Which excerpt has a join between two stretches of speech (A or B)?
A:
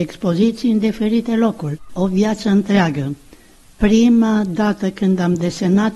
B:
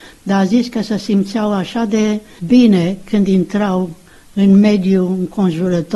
A